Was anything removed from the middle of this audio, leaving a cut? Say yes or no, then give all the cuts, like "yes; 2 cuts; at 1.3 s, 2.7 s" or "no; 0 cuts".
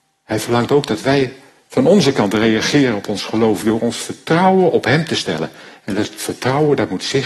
no; 0 cuts